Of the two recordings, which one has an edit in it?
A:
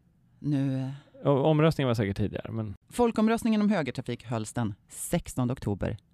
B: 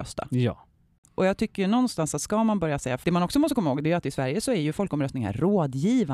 B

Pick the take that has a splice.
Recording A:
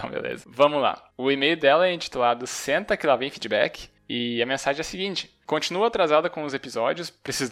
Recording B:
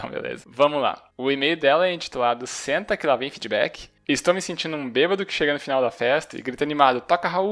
B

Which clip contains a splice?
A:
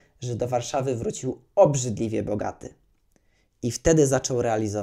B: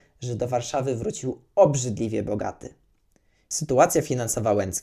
B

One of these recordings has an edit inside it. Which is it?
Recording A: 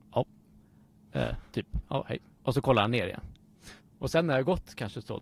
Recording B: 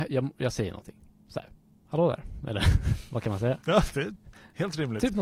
A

